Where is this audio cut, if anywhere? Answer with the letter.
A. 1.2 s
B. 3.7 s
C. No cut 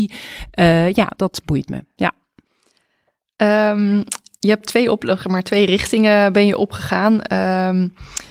A